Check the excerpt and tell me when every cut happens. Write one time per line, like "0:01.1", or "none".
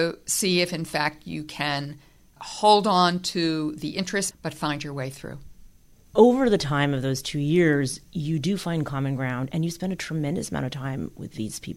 0:04.3
0:09.5

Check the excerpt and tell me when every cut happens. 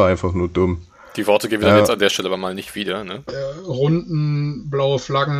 0:03.3

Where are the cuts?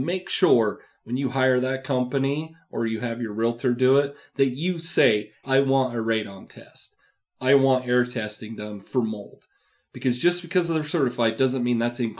0:05.4

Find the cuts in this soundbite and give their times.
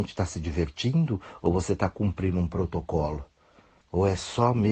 0:03.8

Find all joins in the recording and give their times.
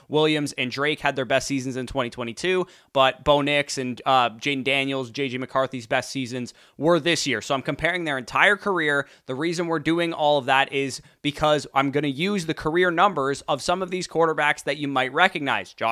none

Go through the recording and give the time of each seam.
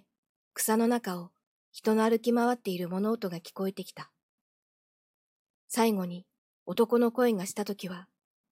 none

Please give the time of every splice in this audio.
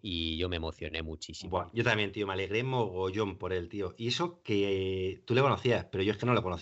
none

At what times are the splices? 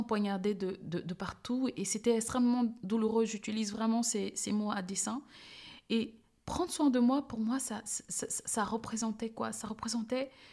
none

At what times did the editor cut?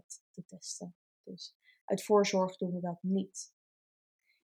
none

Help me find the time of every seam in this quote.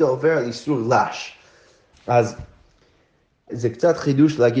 0:01.9
0:03.5

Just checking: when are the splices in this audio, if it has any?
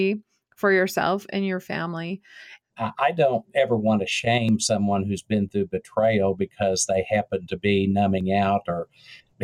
0:02.7

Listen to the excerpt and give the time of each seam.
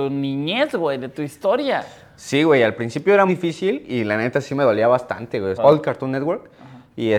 0:03.3
0:05.5

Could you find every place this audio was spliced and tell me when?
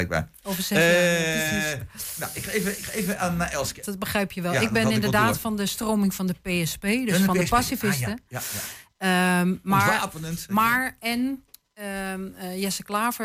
0:03.8

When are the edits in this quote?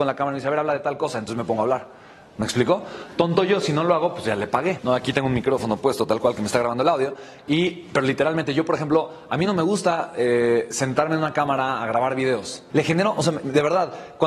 0:04.8
0:12.7

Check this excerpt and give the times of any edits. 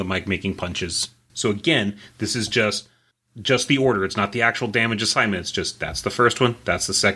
0:01.3

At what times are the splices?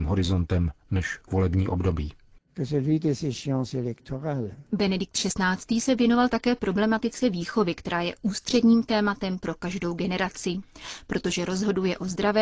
none

